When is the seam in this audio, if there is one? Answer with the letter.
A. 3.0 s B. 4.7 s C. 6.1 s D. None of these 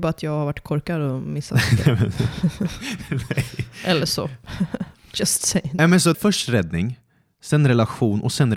C